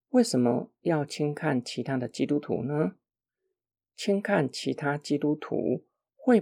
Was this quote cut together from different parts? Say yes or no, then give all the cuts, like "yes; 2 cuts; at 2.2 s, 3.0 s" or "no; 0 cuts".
no; 0 cuts